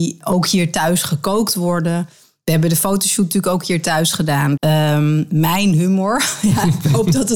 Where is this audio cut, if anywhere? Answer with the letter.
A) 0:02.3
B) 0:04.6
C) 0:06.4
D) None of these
B